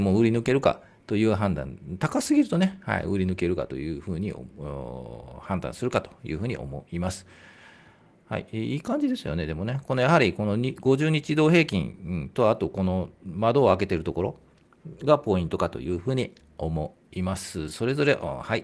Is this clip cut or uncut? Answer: uncut